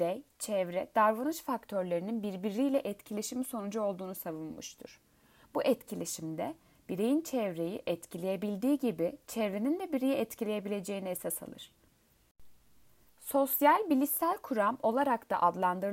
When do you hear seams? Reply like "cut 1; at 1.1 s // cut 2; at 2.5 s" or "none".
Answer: cut 1; at 13.1 s